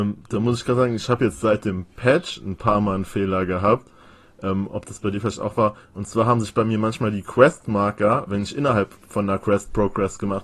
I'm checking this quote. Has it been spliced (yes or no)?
no